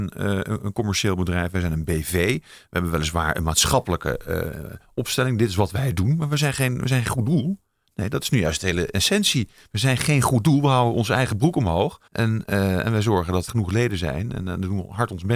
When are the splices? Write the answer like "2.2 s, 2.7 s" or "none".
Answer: 12.1 s, 13.5 s